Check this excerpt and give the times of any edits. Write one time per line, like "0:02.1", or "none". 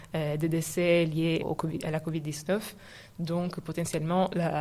0:01.4